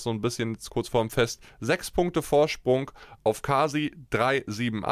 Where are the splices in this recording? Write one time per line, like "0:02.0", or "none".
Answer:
none